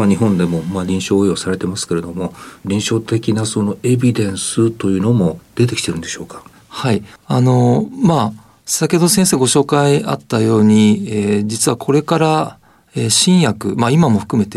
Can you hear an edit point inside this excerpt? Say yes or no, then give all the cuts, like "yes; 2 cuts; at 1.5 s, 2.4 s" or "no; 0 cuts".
no; 0 cuts